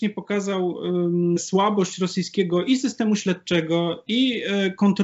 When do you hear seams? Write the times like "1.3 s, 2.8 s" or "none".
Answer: 1.4 s